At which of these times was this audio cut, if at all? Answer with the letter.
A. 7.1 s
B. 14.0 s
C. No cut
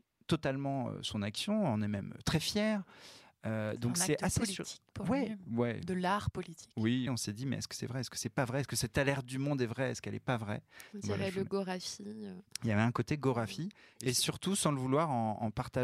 A